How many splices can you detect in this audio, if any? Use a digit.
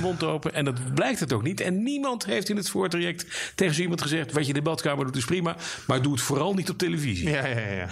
0